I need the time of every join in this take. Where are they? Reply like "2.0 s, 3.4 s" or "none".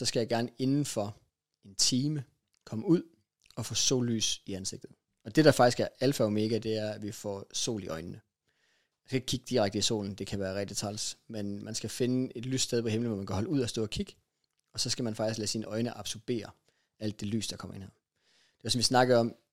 none